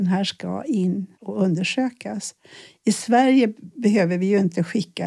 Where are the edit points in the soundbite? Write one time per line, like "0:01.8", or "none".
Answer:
0:01.1

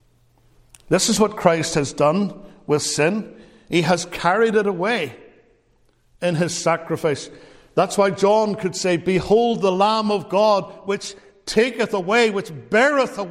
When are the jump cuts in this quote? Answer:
none

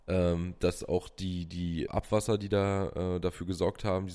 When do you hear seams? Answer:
0:01.9

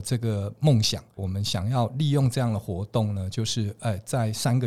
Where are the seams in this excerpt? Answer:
0:01.2

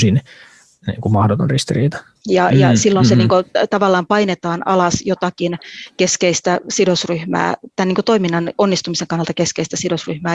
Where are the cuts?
0:02.2

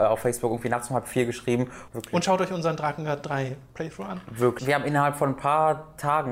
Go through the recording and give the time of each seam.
0:01.9
0:04.6

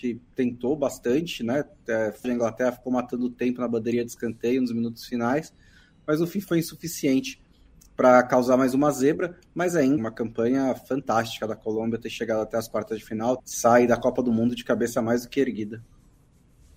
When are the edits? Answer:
0:02.2
0:10.0
0:13.4

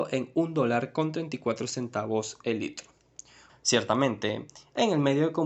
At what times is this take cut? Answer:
0:03.5

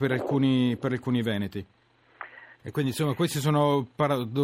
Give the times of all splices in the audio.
0:02.6

